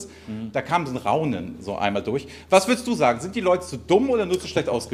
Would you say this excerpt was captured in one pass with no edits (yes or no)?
yes